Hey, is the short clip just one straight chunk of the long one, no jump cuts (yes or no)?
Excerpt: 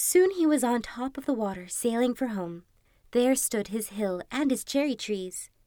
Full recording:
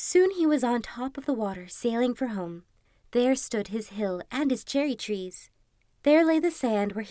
yes